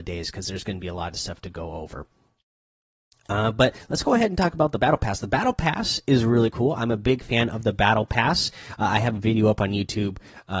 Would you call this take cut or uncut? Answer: uncut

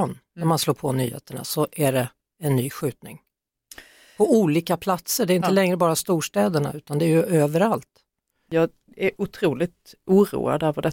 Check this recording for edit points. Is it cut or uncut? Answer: uncut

